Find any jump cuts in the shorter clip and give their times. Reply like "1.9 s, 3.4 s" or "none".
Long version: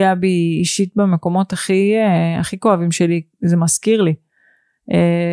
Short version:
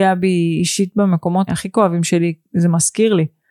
1.5 s